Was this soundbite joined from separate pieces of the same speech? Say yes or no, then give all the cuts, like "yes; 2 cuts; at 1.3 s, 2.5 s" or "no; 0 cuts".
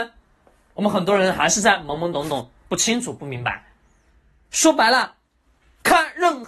no; 0 cuts